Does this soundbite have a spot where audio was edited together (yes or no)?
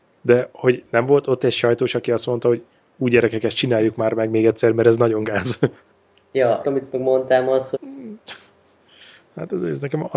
yes